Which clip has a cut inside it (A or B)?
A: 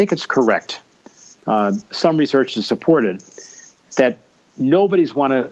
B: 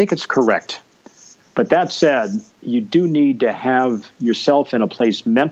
B